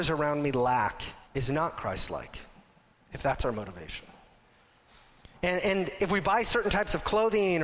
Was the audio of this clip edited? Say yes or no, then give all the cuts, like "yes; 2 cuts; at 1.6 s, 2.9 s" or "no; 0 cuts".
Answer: yes; 1 cut; at 1.3 s